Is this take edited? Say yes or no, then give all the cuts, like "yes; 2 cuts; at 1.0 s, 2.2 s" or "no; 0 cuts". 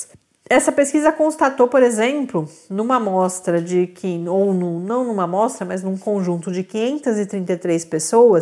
no; 0 cuts